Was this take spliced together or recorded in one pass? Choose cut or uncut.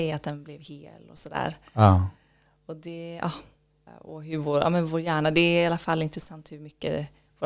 cut